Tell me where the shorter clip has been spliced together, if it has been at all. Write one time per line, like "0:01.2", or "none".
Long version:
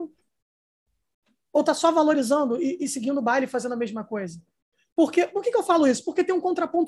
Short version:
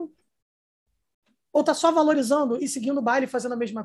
0:02.6